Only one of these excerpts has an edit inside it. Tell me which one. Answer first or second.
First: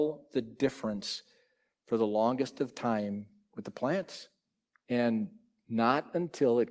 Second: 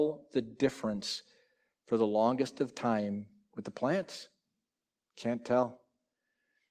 first